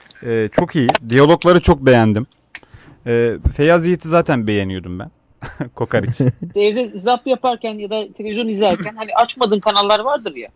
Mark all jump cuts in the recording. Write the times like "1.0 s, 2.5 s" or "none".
5.3 s, 6.5 s